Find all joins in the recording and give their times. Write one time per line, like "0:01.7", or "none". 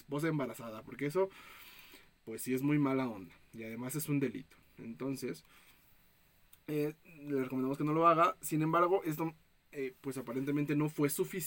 none

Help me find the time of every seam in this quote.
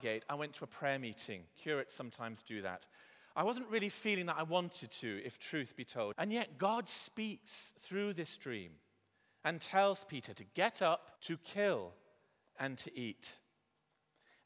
0:06.1
0:11.2

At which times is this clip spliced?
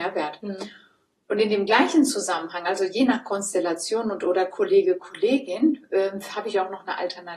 none

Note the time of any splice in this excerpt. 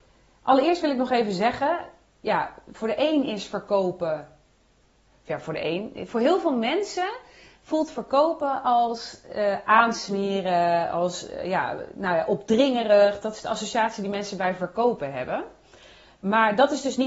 none

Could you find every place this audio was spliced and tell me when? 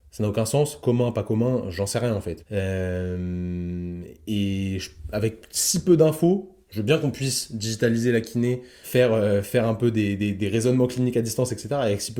0:02.4
0:08.8

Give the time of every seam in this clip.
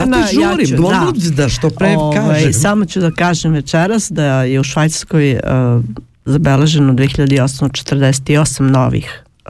none

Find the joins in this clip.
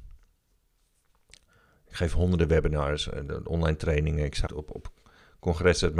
0:04.5

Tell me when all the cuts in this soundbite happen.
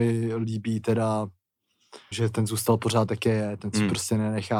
0:02.1

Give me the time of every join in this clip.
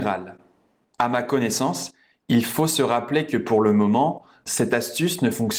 none

